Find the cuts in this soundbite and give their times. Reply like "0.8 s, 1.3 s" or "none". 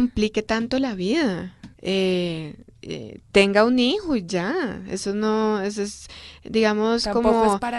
1.7 s